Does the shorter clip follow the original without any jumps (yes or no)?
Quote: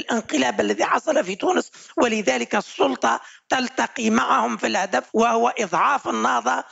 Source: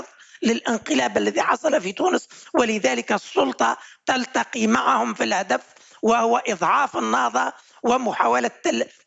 no